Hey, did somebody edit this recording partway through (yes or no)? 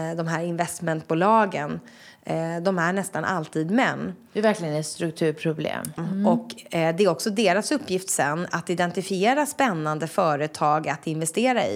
yes